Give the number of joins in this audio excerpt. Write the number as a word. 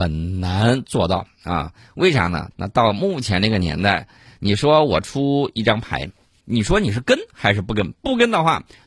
two